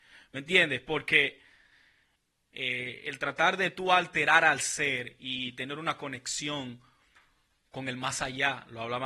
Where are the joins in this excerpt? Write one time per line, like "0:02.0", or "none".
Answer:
0:02.5